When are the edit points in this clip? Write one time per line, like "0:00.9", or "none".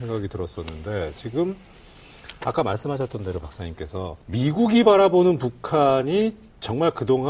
0:04.2